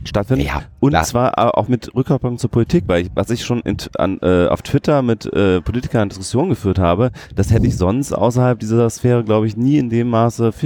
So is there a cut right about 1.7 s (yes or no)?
yes